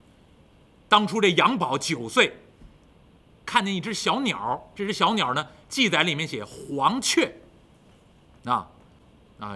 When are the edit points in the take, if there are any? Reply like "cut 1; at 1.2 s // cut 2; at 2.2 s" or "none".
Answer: none